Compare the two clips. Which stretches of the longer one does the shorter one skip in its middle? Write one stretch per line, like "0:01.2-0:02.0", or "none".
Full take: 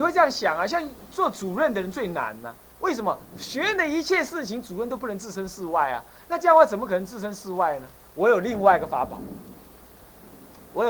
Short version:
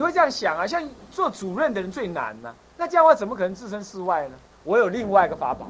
0:02.7-0:06.2